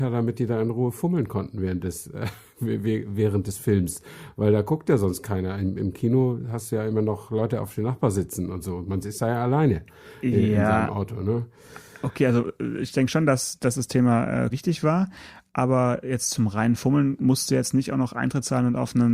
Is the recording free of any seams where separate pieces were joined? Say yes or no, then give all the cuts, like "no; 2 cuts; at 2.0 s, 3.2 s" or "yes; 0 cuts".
no; 1 cut; at 14.5 s